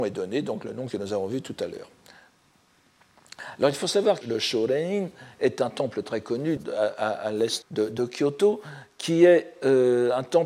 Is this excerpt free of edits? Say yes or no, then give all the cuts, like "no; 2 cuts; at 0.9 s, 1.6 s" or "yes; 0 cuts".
no; 3 cuts; at 4.2 s, 6.6 s, 7.6 s